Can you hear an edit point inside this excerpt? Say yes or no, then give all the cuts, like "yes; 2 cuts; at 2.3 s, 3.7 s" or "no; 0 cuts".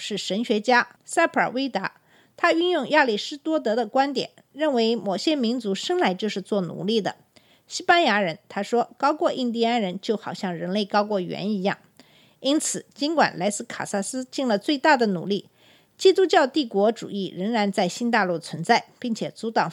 no; 0 cuts